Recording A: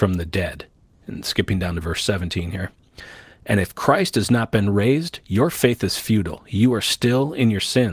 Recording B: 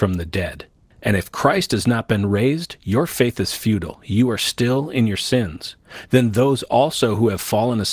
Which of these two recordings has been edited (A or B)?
B